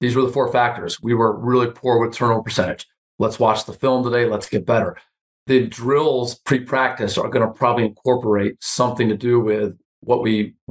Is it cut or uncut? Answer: uncut